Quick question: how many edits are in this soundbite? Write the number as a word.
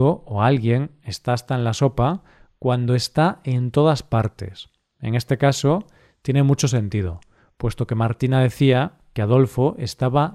zero